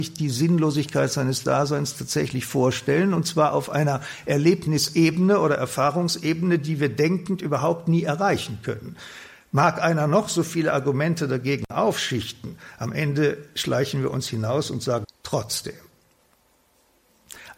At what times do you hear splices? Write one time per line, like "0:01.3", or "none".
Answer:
0:15.0